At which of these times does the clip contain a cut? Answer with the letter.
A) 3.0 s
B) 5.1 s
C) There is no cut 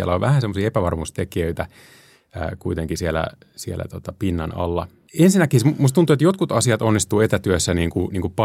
B